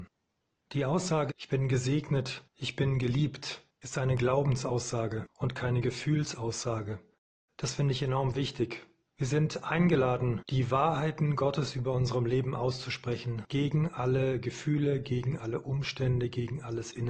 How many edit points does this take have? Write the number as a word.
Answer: one